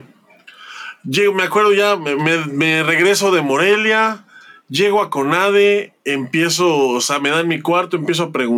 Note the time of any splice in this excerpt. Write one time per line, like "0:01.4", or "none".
none

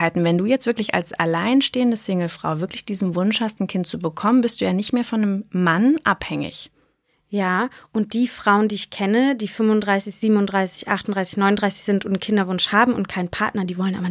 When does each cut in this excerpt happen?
none

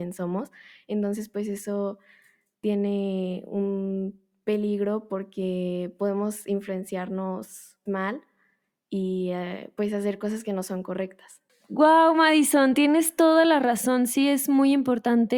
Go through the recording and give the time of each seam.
0:07.9

